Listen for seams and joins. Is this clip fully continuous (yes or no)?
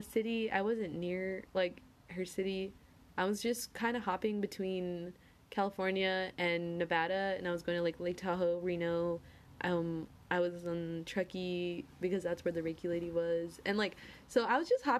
yes